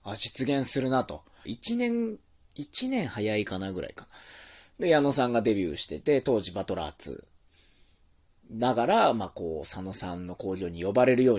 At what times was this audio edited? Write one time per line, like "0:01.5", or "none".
0:01.5